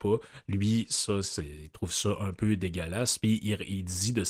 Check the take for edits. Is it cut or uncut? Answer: uncut